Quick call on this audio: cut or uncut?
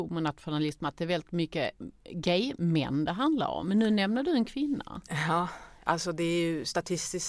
uncut